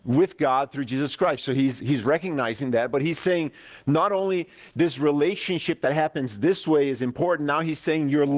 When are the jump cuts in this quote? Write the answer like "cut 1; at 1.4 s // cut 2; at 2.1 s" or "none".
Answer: cut 1; at 1.4 s